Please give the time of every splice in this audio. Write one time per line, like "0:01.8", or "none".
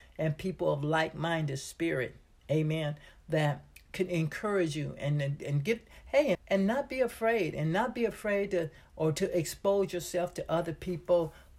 0:06.3